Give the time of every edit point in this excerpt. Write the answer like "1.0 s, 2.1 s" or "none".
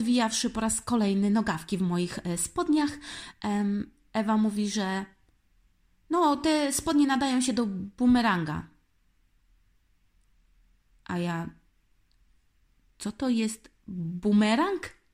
none